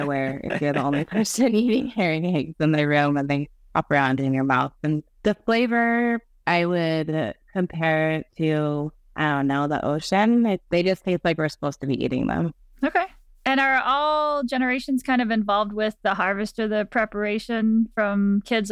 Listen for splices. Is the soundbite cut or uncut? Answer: uncut